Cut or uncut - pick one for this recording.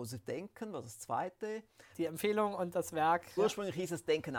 cut